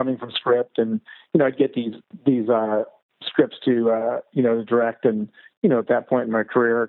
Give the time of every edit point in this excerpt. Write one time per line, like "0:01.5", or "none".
none